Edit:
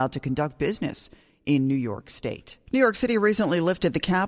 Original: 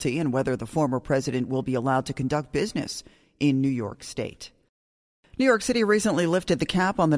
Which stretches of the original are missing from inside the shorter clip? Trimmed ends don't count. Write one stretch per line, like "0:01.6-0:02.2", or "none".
0:04.6-0:05.3